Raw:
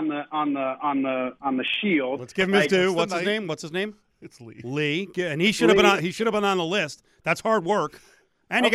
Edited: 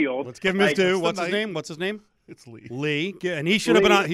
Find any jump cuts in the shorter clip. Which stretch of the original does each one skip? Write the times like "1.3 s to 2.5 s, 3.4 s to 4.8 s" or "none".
none